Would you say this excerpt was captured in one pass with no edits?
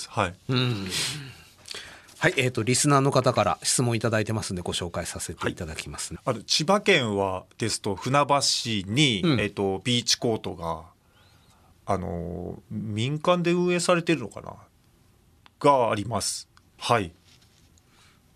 no; 2 cuts; at 6.2 s, 16.8 s

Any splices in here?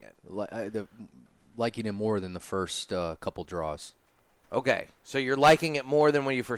no; 0 cuts

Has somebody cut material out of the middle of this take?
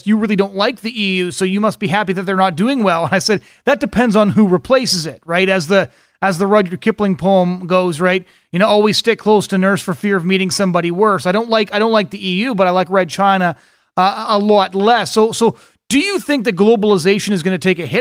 no; 0 cuts

